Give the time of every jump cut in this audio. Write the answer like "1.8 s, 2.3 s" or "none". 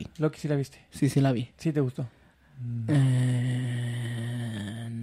none